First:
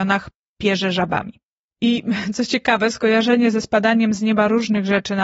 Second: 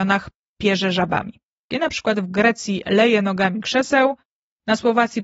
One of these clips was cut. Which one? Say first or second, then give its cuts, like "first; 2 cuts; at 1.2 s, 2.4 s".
second; 1 cut; at 1.7 s